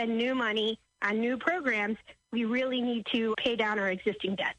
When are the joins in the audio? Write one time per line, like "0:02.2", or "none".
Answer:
0:03.3